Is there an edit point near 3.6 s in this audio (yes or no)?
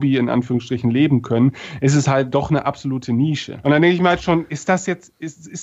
yes